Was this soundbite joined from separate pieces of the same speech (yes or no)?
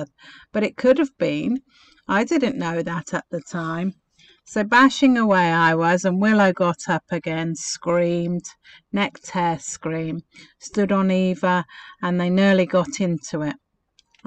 no